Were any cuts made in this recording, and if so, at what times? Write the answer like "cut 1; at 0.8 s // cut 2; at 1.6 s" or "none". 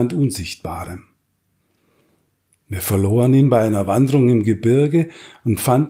none